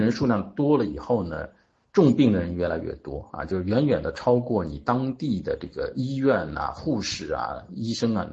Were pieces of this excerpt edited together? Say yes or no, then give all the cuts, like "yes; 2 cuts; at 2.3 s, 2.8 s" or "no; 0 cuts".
no; 0 cuts